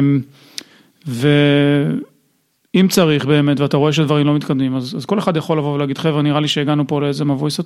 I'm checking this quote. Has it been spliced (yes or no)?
no